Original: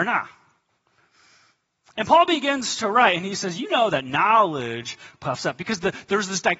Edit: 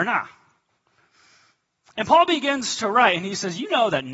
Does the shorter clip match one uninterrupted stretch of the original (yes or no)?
yes